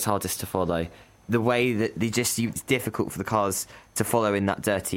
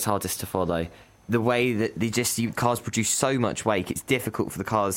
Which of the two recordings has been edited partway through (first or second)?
first